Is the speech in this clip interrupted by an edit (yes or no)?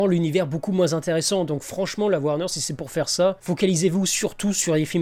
no